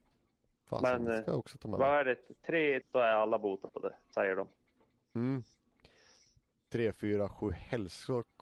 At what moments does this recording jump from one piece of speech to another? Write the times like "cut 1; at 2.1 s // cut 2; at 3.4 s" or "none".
cut 1; at 2.8 s